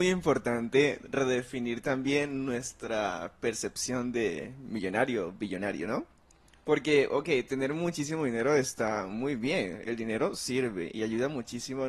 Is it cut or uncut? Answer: uncut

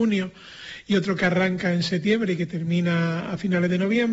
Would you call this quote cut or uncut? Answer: uncut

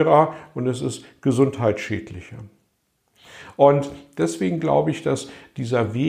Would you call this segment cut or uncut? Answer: uncut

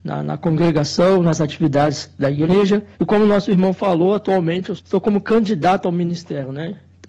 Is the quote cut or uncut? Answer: cut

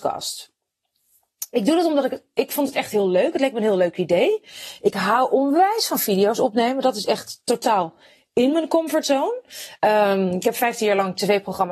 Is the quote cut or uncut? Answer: uncut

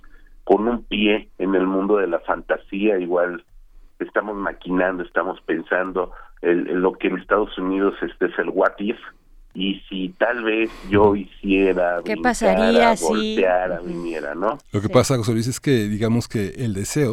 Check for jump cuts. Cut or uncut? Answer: cut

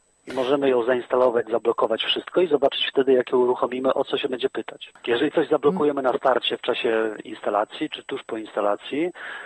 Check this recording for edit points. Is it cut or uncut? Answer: uncut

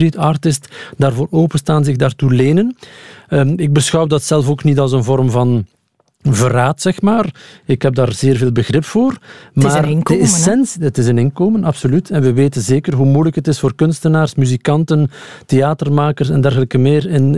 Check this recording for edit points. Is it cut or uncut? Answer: uncut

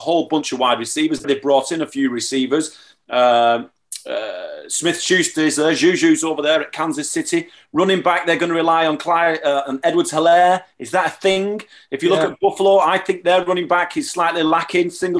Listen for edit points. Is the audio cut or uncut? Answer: cut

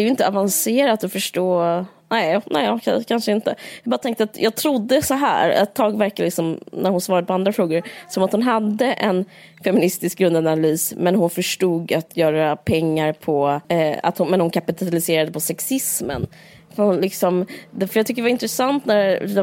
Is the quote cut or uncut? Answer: cut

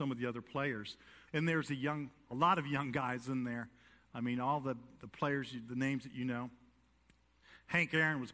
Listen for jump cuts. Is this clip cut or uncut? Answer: cut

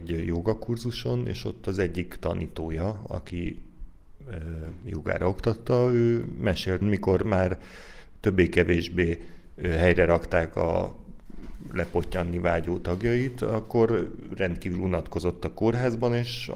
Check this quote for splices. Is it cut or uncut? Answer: cut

